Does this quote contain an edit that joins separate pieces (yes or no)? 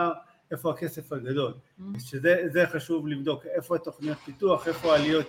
no